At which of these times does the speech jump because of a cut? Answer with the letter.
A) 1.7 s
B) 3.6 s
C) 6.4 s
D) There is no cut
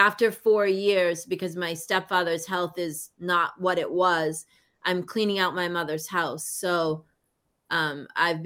D